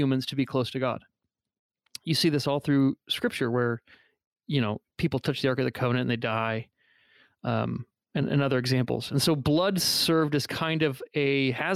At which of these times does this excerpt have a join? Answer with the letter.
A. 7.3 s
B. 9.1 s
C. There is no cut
C